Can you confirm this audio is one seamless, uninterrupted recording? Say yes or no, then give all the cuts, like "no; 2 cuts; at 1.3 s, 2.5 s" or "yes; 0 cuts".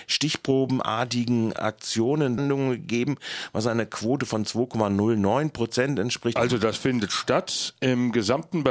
no; 2 cuts; at 2.4 s, 6.4 s